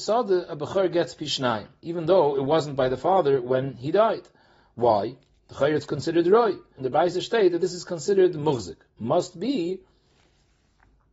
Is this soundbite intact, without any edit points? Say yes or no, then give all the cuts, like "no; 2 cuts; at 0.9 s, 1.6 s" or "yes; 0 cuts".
no; 1 cut; at 6.8 s